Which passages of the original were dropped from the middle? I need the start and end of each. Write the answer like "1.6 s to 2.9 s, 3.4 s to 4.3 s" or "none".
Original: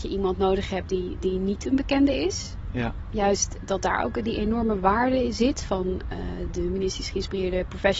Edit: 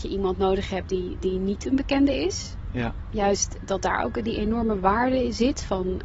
none